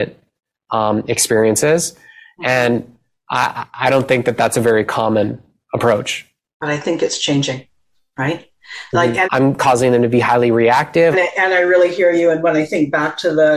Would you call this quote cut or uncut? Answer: cut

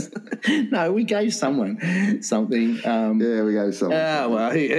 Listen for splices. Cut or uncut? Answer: uncut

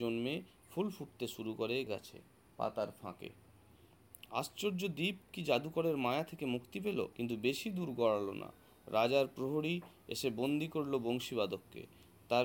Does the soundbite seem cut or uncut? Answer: cut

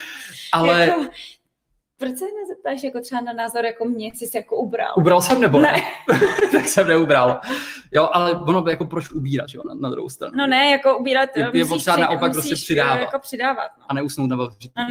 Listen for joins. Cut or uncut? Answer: uncut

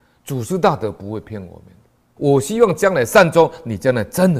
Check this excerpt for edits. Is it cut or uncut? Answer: cut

